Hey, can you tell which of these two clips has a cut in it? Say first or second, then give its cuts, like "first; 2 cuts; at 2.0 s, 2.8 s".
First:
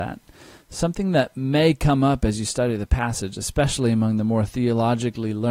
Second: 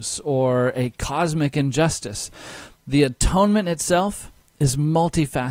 second; 1 cut; at 2.8 s